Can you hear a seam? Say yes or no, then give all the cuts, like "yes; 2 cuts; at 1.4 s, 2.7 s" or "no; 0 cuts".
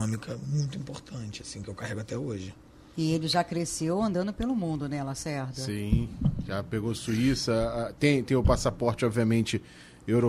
no; 0 cuts